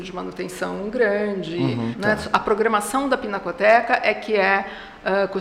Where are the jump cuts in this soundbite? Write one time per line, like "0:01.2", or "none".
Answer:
0:01.9